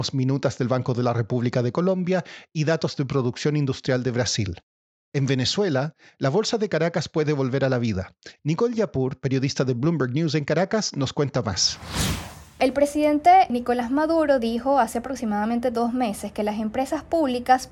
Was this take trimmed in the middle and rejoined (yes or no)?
yes